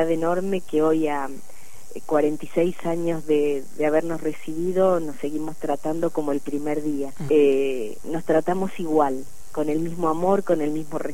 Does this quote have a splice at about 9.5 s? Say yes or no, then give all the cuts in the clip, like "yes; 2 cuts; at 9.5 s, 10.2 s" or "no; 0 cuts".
no; 1 cut; at 7.3 s